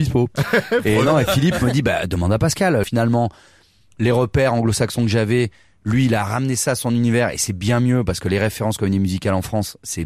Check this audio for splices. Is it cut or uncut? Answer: cut